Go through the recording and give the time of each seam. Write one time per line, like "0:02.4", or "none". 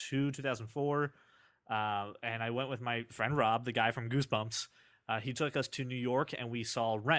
none